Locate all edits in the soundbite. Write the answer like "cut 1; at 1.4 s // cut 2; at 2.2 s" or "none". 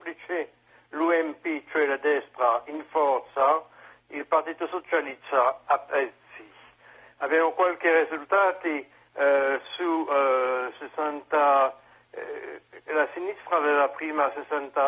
cut 1; at 12.9 s